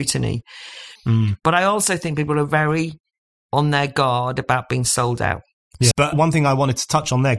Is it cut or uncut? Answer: cut